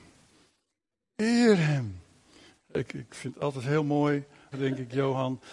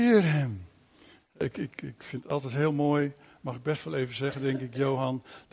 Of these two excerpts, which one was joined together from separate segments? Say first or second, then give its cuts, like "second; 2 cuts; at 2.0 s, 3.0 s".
first; 2 cuts; at 2.9 s, 4.5 s